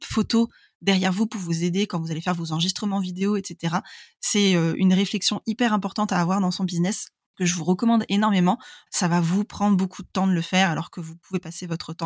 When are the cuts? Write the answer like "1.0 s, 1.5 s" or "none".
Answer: 8.9 s